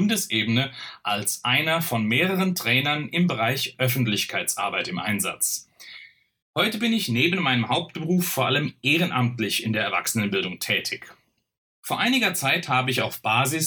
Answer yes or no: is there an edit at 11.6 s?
yes